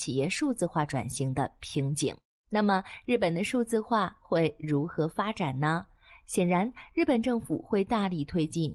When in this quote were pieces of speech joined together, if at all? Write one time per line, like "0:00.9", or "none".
none